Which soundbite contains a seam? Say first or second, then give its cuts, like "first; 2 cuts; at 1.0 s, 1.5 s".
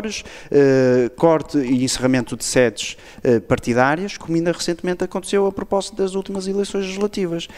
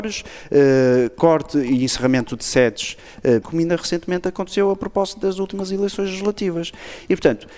second; 1 cut; at 3.4 s